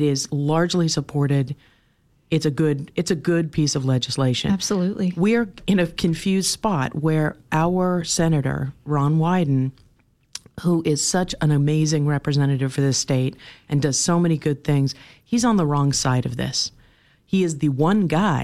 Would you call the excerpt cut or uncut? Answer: uncut